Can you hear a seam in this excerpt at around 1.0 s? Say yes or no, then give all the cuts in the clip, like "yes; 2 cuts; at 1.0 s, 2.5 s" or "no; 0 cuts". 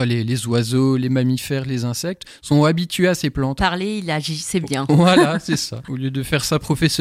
no; 1 cut; at 3.6 s